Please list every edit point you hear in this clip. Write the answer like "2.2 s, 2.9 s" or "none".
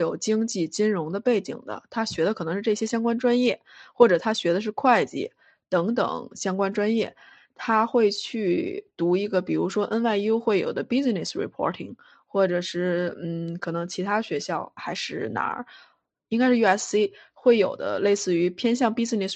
14.8 s